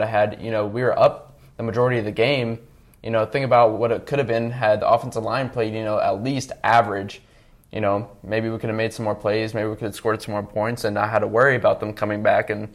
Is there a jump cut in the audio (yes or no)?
yes